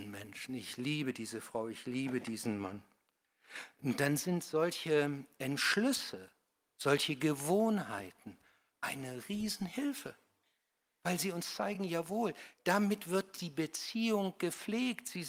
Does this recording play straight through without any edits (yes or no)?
yes